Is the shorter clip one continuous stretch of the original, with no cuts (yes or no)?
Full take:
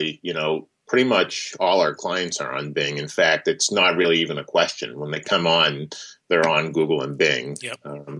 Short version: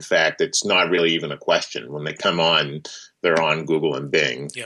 yes